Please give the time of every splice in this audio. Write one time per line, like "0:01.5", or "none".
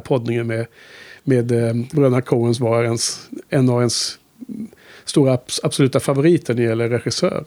0:01.9